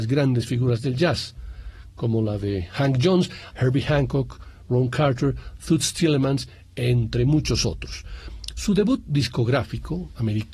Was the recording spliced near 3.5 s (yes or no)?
yes